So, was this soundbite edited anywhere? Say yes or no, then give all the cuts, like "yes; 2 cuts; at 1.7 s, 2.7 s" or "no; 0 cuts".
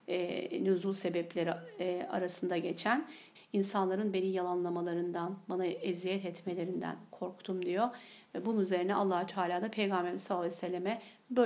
yes; 1 cut; at 3.4 s